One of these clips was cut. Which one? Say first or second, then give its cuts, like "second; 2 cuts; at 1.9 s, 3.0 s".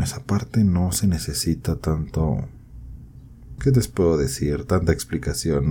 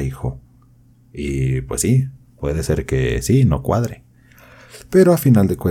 first; 1 cut; at 3.6 s